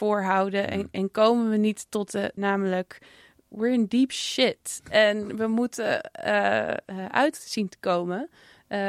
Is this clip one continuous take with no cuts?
no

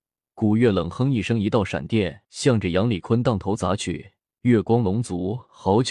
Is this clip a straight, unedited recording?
no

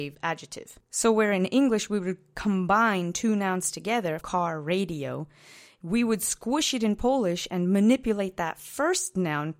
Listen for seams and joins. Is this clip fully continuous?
no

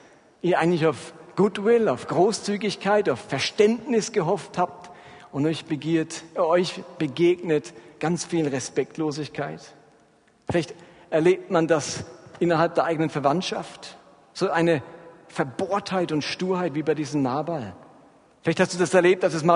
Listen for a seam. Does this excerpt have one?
no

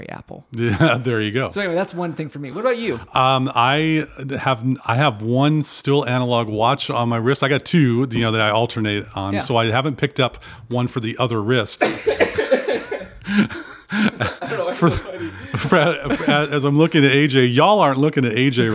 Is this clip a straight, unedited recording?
no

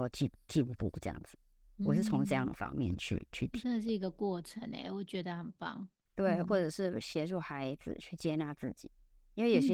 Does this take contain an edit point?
yes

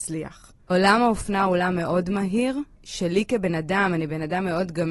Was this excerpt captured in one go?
no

